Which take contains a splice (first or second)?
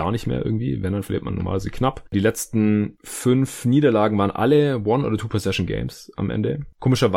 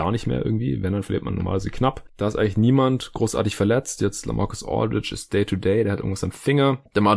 second